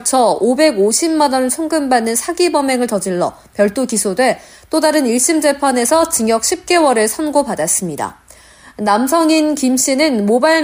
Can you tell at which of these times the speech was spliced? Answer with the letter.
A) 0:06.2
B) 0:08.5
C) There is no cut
C